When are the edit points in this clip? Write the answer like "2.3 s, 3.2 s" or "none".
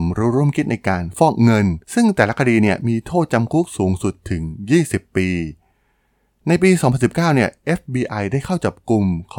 1.8 s

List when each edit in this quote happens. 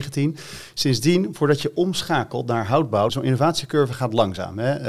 3.1 s

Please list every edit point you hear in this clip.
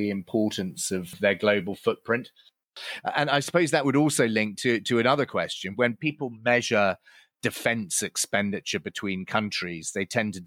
5.7 s

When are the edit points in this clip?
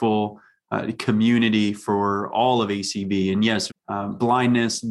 3.7 s

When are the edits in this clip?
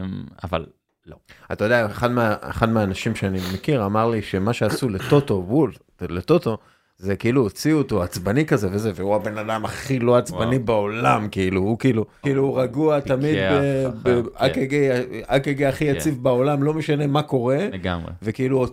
12.2 s

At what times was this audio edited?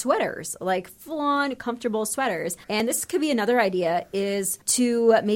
2.6 s

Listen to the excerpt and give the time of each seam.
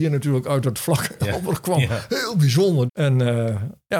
2.9 s

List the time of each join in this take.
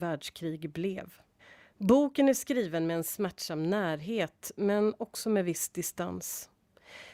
none

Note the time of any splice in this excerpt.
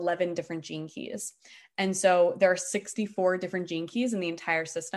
none

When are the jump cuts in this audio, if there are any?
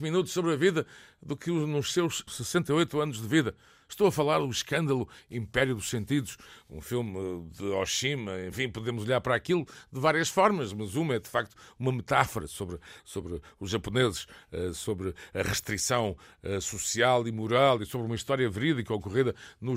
2.3 s

